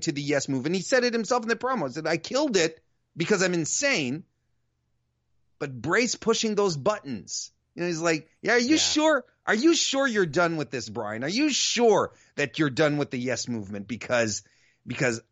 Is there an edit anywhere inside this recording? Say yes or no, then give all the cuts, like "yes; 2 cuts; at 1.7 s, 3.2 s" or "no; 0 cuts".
no; 0 cuts